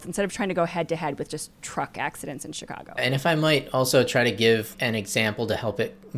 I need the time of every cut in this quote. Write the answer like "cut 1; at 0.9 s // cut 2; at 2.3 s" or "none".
cut 1; at 3.0 s // cut 2; at 4.7 s

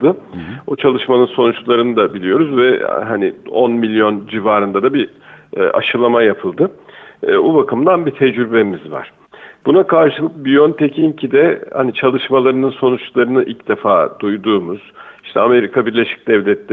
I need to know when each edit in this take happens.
none

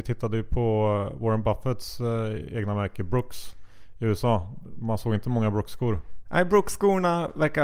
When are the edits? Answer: none

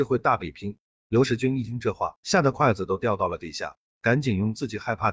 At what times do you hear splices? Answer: cut 1; at 0.9 s

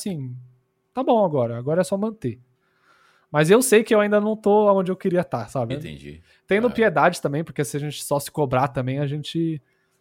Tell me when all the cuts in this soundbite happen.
cut 1; at 5.7 s

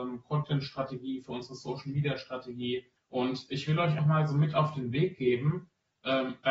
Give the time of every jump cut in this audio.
cut 1; at 3.0 s // cut 2; at 4.0 s

